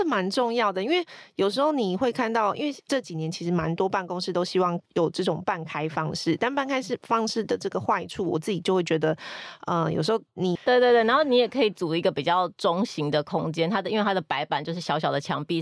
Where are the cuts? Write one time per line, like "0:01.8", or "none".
0:10.6